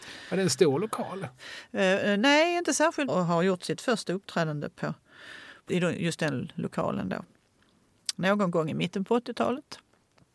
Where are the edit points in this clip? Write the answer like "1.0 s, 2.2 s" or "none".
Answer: 3.1 s